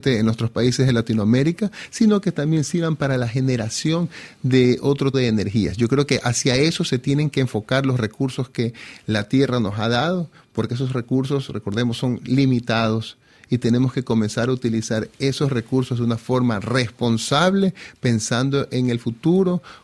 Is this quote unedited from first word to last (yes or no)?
no